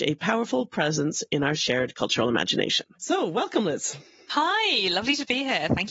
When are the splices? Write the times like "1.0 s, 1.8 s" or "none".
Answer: 2.9 s